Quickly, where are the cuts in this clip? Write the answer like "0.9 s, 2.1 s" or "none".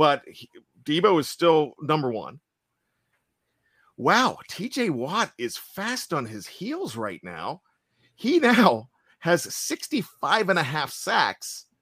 none